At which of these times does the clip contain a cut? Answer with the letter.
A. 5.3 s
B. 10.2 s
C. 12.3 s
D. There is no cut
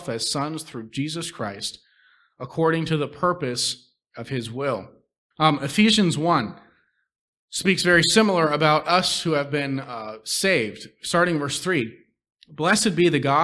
A